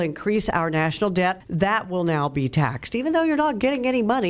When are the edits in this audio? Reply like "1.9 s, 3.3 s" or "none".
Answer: 1.4 s